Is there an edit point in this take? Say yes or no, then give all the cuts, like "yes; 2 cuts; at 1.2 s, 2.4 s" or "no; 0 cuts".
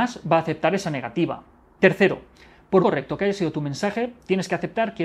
yes; 1 cut; at 2.8 s